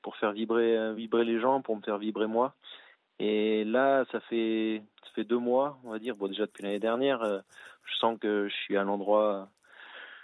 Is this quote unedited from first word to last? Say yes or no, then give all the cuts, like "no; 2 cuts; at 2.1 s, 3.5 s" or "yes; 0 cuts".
yes; 0 cuts